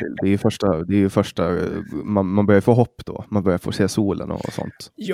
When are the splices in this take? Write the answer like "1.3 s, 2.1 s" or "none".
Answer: none